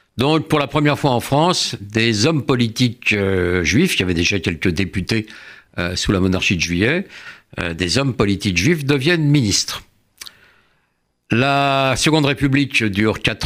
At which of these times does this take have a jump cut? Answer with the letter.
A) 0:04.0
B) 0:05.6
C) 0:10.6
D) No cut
D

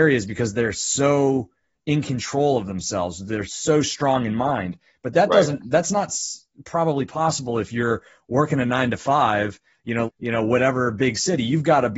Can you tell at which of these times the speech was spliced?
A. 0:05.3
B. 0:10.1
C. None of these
B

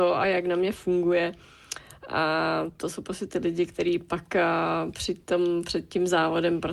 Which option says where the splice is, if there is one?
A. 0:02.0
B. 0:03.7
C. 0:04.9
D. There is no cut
B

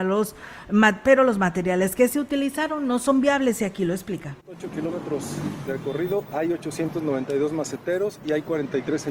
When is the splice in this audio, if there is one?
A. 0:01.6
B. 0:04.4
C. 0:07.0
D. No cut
B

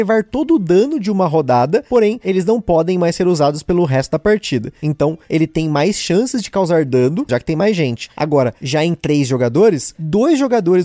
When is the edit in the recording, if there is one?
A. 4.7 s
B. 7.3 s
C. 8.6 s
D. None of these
B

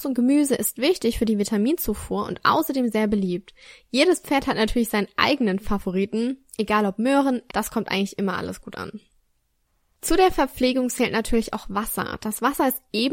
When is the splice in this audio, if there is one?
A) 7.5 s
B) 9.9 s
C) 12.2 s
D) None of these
A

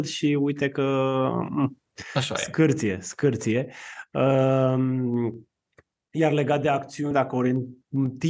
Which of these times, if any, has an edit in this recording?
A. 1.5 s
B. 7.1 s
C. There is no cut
B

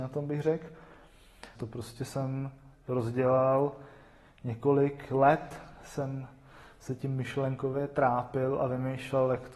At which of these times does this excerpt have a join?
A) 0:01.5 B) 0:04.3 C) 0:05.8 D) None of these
A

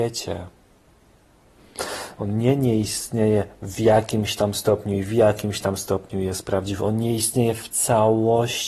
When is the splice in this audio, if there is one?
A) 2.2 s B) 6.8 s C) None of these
A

